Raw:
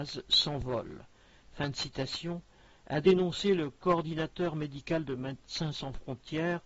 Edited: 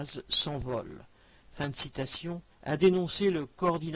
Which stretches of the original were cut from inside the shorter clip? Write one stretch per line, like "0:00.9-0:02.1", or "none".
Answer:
0:02.5-0:02.7